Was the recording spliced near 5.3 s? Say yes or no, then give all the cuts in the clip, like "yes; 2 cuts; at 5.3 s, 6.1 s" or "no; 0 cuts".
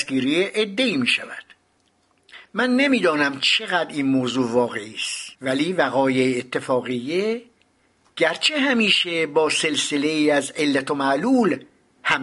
yes; 1 cut; at 5.3 s